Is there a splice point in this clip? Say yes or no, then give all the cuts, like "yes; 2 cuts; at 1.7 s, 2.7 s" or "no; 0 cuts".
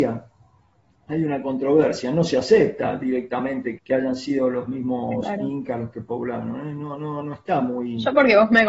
yes; 1 cut; at 3.8 s